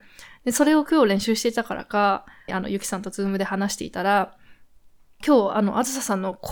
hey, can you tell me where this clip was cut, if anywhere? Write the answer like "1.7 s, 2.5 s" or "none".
2.5 s

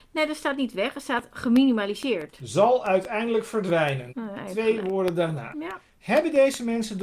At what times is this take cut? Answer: 4.1 s, 5.5 s

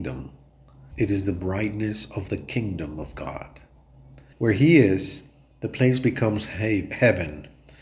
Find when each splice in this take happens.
0.9 s, 4.3 s

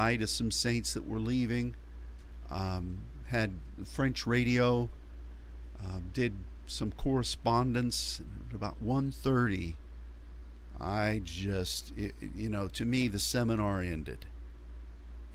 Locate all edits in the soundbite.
none

